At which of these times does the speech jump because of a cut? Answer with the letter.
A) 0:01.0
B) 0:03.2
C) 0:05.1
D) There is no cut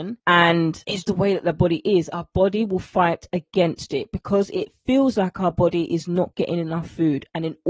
A